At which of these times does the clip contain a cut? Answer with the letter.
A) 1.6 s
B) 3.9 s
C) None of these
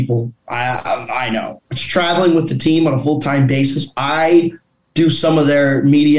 A